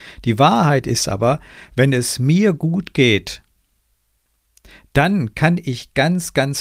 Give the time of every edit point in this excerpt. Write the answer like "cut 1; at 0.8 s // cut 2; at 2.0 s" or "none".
none